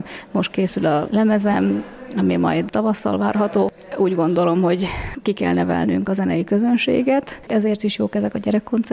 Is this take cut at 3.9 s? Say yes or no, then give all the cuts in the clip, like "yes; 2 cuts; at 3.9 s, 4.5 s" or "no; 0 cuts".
no; 1 cut; at 7.5 s